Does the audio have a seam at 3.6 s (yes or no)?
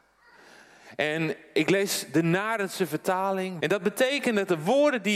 yes